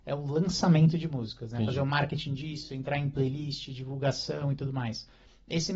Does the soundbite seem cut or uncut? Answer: uncut